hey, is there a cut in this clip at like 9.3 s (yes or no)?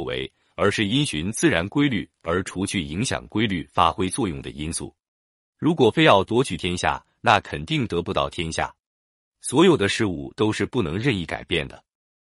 no